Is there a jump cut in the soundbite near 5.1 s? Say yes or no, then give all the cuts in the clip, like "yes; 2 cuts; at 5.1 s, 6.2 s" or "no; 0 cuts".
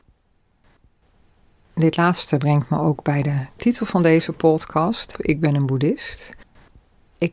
yes; 1 cut; at 5.1 s